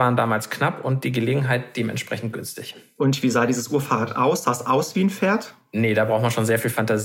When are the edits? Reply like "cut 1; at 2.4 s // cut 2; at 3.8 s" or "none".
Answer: none